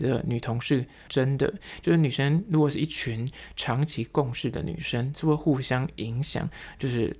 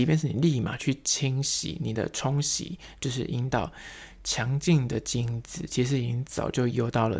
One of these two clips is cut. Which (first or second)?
first